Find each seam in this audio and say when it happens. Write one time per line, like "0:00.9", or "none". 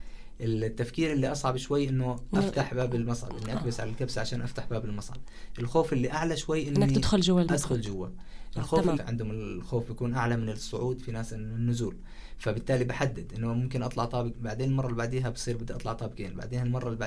0:09.0

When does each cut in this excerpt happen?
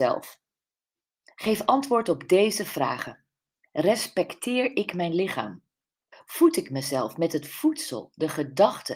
0:06.1

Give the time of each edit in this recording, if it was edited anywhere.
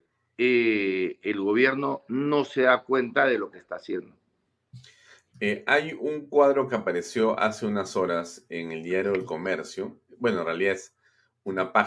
none

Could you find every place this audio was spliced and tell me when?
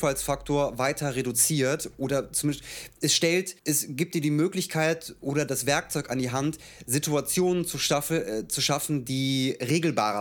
0:03.6

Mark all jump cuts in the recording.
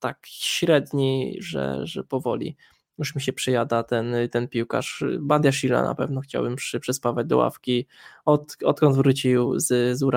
none

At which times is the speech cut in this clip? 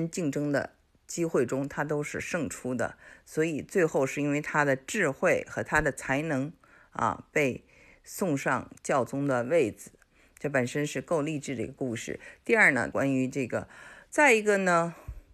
0:12.9
0:14.1

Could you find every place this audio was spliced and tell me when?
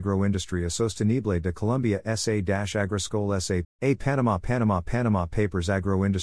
0:03.6

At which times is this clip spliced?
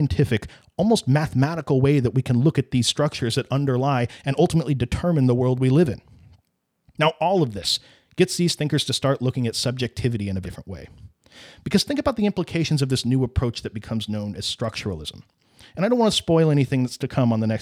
0:10.4

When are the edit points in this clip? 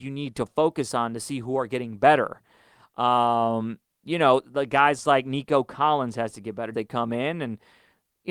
0:06.7

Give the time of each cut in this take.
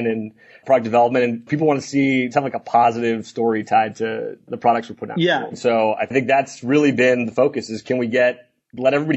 0:02.3
0:05.5

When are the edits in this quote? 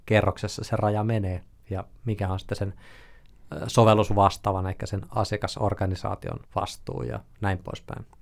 0:06.5

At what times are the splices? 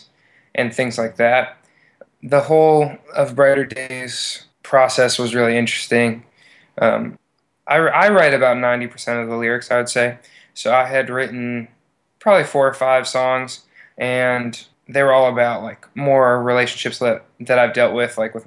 0:02.0

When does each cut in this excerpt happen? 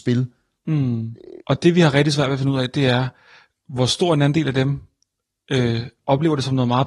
0:01.4

